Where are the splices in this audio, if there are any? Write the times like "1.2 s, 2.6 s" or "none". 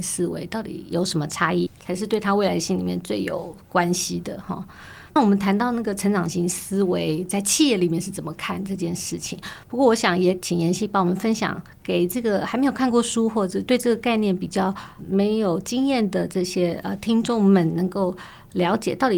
1.7 s, 5.2 s